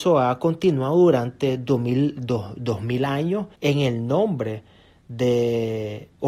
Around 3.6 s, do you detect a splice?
yes; 1 cut; at 3.6 s

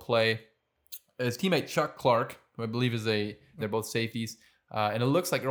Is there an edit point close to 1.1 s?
no; 1 cut; at 3.6 s

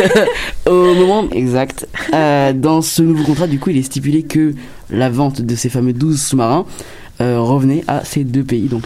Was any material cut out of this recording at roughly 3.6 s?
no; 1 cut; at 1.3 s

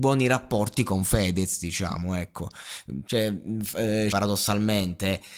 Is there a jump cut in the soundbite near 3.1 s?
yes; 2 cuts; at 3.1 s, 4.1 s

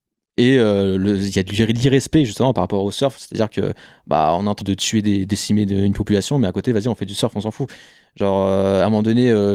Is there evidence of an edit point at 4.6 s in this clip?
yes; 1 cut; at 4.6 s

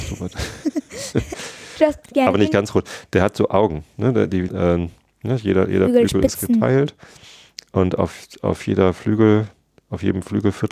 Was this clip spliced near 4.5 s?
yes; 1 cut; at 4.5 s

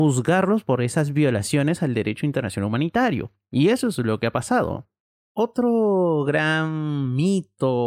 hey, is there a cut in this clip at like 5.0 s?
no; 0 cuts

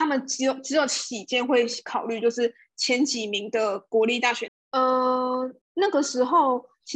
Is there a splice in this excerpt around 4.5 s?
yes; 2 cuts; at 4.5 s, 5.6 s

